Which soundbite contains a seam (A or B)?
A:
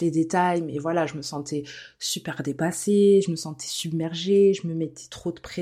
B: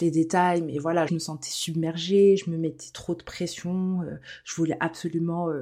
B